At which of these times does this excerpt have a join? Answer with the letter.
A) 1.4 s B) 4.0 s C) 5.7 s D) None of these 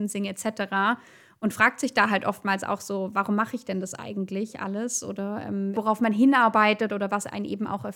C